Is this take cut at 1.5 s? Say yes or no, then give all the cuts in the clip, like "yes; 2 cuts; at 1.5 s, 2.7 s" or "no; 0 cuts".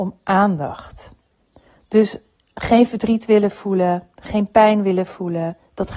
no; 0 cuts